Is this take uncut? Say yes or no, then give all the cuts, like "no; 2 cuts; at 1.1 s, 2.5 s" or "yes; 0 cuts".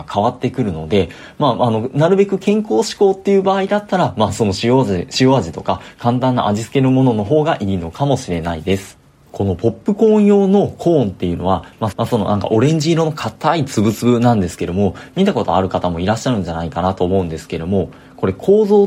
no; 2 cuts; at 9.3 s, 11.9 s